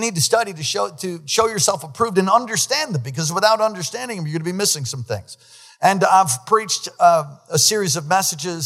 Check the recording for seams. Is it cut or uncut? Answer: uncut